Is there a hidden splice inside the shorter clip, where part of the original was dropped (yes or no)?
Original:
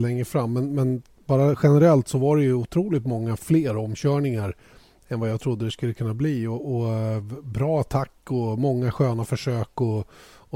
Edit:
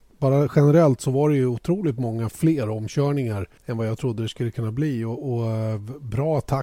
yes